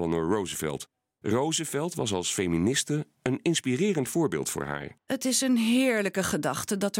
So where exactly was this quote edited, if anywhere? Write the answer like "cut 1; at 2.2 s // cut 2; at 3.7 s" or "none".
cut 1; at 1.2 s

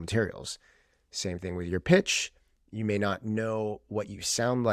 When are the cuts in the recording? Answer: none

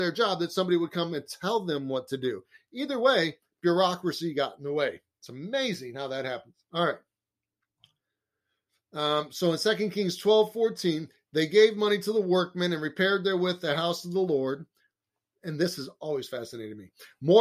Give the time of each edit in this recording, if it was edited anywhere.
none

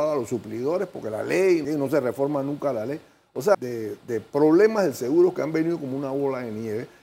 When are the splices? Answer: cut 1; at 1.6 s // cut 2; at 3.5 s

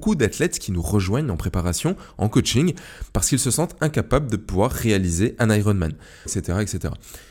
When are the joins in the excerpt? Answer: cut 1; at 6.3 s

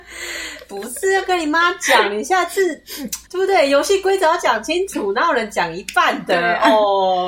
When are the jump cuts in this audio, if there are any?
cut 1; at 3.3 s

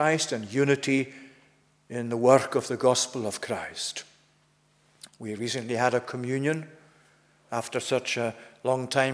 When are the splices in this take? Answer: cut 1; at 5.1 s

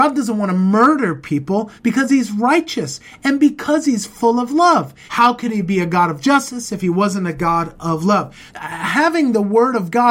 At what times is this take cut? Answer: cut 1; at 1.8 s // cut 2; at 5.1 s // cut 3; at 8.5 s

